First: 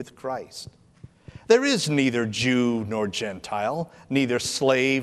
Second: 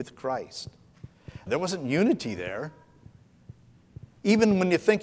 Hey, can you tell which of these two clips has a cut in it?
second; 1 cut; at 1.5 s

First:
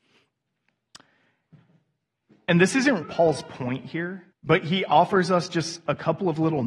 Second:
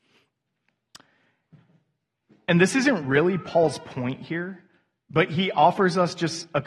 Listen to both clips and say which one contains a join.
first; 2 cuts; at 3.0 s, 4.3 s

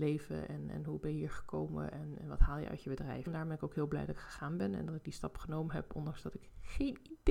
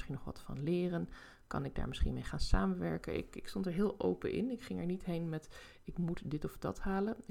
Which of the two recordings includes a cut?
first; 1 cut; at 3.3 s

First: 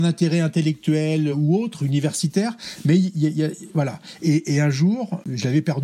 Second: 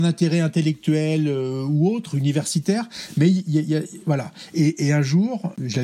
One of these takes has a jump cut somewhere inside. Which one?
first; 1 cut; at 1.3 s

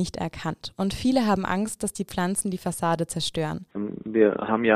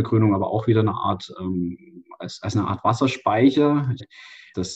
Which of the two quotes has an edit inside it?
first; 1 cut; at 3.7 s

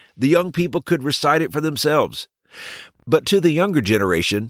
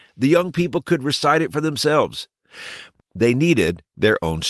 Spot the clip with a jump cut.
second; 1 cut; at 3.0 s

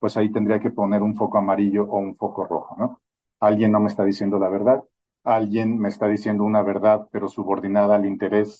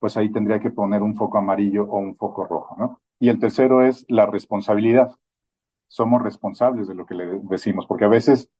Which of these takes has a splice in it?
second; 1 cut; at 3.2 s

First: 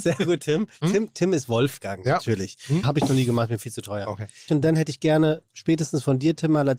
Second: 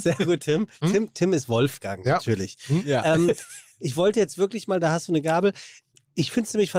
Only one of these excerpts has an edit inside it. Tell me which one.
first; 2 cuts; at 2.8 s, 4.5 s

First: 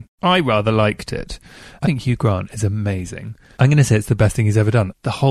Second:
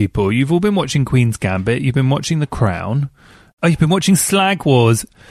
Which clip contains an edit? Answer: first; 2 cuts; at 1.8 s, 3.5 s

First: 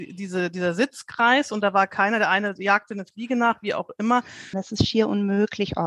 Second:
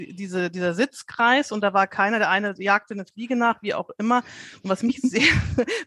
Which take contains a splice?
first; 1 cut; at 4.5 s

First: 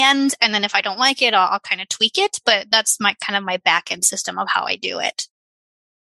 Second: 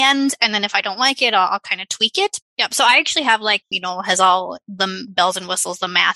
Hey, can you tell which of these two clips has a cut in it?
second; 2 cuts; at 2.4 s, 3.6 s

